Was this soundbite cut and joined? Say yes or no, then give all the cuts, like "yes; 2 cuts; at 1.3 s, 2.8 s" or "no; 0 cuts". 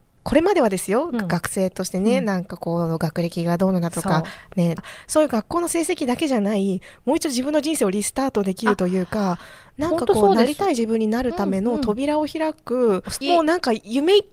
yes; 2 cuts; at 4.8 s, 13.2 s